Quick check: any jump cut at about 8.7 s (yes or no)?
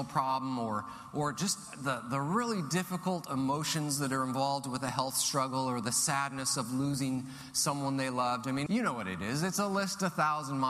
yes